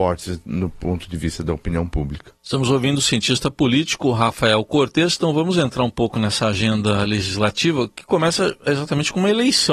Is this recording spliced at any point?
no; 0 cuts

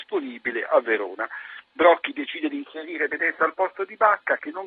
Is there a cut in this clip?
no; 0 cuts

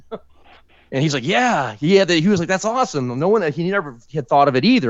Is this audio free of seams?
yes; 0 cuts

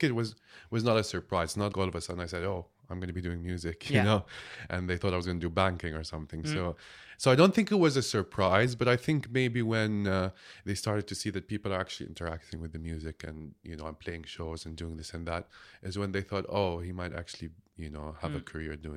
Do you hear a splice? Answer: yes; 1 cut; at 1.7 s

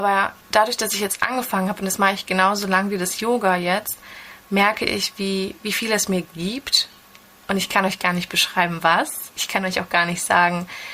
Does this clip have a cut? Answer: no; 0 cuts

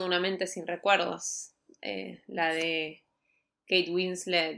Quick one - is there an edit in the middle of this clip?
no; 0 cuts

